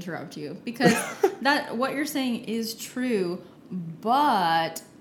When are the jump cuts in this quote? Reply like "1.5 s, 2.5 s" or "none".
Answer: none